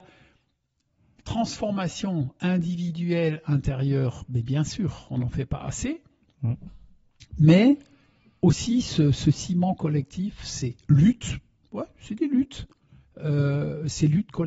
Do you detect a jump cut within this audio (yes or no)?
no